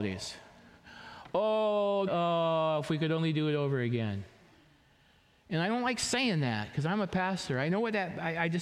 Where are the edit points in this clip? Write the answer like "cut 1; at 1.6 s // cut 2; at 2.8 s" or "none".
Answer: cut 1; at 2.1 s